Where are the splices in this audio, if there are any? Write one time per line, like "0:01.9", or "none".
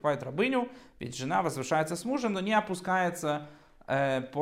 none